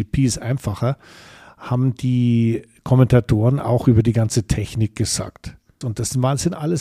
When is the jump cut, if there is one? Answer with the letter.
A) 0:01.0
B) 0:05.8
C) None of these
B